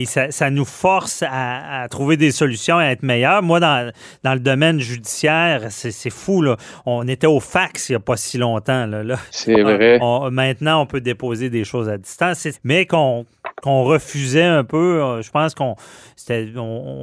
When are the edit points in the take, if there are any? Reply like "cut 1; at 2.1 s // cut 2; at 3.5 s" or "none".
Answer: cut 1; at 12.5 s